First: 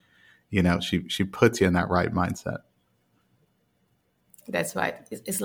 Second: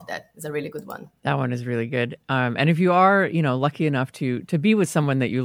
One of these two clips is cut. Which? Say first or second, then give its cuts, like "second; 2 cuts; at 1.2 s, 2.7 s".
second; 1 cut; at 1.2 s